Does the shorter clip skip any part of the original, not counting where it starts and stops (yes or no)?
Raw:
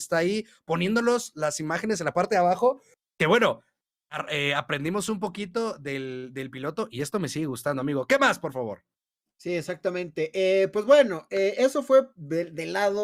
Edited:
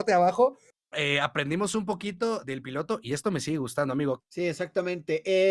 yes